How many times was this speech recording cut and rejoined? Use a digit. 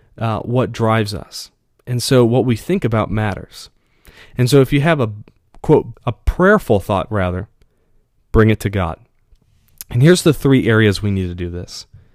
1